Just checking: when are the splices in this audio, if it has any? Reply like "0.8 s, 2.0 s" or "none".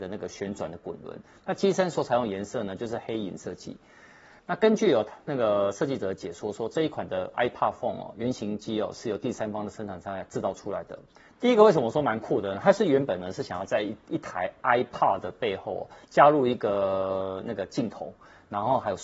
4.4 s, 11.3 s